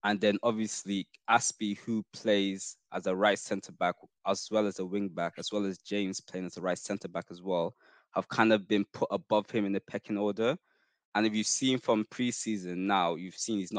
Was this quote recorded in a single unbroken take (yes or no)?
yes